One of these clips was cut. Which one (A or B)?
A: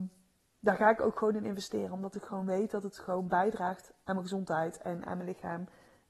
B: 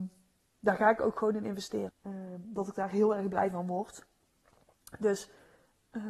B